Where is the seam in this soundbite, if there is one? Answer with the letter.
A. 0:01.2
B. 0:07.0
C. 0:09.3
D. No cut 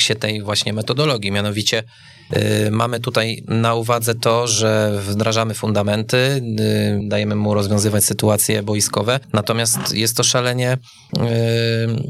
B